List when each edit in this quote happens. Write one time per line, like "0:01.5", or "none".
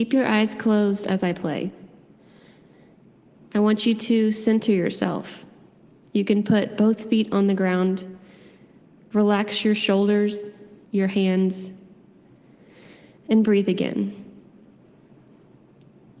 0:10.8